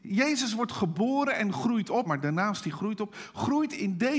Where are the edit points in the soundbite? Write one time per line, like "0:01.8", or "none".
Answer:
0:02.0